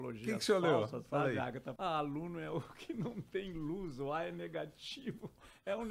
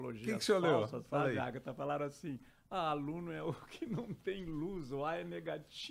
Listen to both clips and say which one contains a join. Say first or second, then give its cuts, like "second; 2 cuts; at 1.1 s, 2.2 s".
first; 1 cut; at 1.8 s